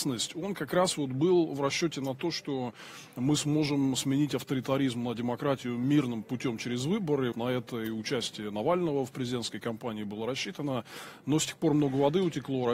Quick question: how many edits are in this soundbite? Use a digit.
1